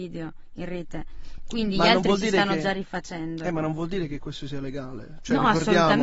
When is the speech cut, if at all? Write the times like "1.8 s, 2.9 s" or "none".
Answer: none